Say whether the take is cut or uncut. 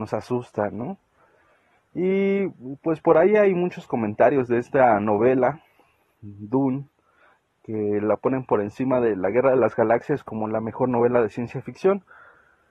uncut